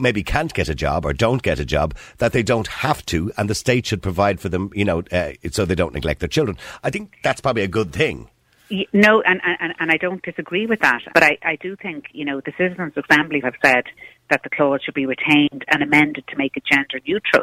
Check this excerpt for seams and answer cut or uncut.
cut